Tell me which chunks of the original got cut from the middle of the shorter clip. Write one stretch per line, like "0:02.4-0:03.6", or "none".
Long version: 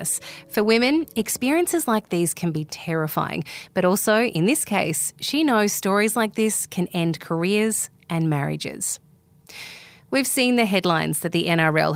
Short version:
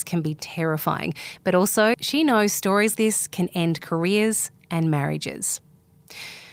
0:04.2-0:05.1
0:06.1-0:06.3